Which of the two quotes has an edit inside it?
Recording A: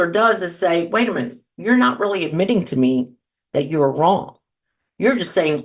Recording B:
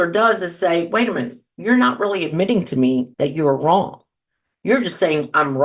B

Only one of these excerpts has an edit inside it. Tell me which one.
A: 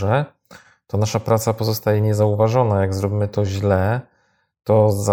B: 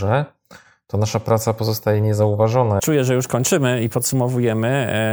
B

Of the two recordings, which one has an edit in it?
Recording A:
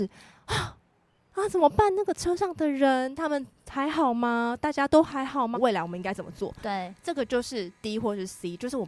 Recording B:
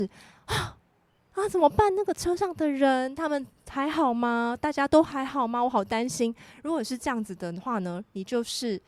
A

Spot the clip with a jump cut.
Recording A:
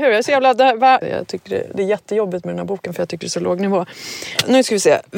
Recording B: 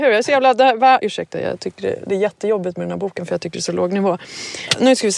A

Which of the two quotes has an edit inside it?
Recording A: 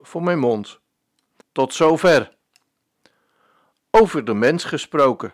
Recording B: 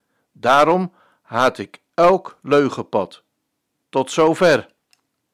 A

